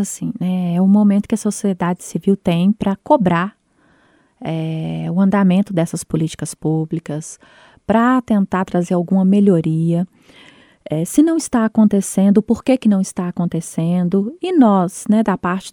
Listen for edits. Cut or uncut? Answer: uncut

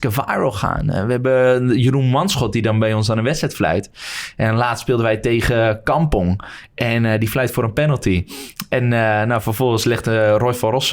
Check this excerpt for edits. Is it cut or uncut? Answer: uncut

